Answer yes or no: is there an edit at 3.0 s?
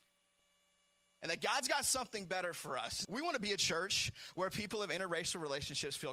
yes